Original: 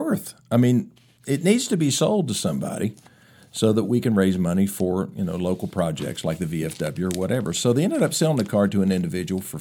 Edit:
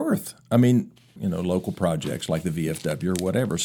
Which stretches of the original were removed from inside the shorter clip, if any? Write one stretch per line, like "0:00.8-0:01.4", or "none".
0:01.2-0:05.1